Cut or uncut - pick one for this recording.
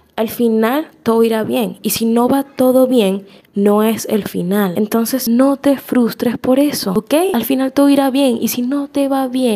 uncut